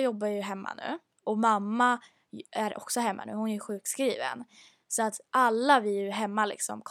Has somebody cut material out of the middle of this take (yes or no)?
no